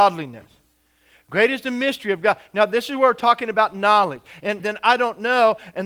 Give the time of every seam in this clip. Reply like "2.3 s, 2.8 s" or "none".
4.6 s